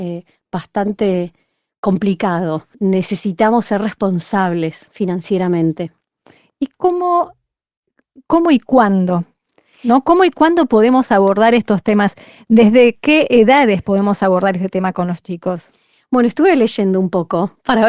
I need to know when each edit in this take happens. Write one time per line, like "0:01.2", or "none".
0:02.7